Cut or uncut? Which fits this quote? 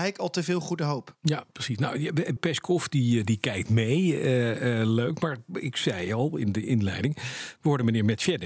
cut